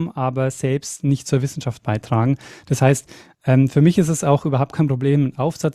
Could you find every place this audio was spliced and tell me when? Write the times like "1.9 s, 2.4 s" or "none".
none